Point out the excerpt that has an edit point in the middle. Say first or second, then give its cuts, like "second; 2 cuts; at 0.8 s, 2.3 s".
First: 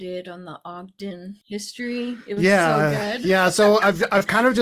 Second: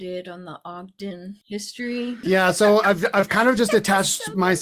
second; 1 cut; at 2.2 s